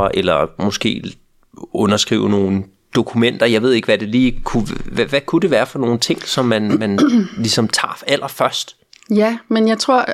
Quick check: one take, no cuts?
yes; 0 cuts

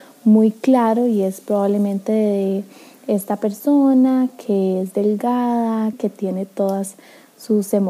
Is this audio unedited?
no; 1 cut; at 5.9 s

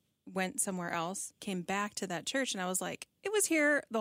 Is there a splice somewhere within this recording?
yes; 1 cut; at 1.4 s

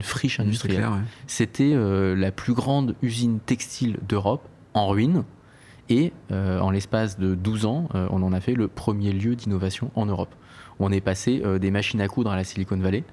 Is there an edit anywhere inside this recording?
no; 0 cuts

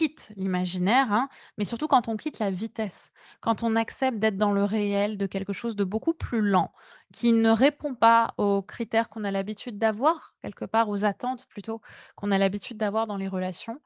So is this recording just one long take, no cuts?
yes; 0 cuts

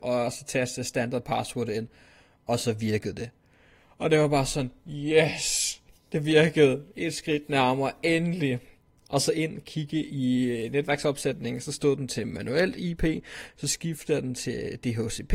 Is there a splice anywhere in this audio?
no; 0 cuts

